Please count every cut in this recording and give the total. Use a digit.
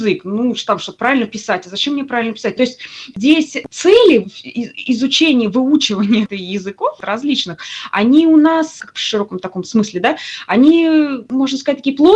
2